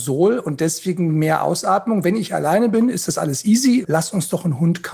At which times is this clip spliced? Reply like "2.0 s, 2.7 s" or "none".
3.8 s